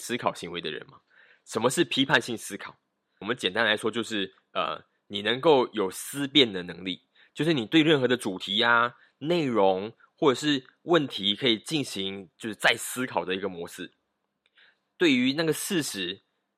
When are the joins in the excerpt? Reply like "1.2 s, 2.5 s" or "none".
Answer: 3.2 s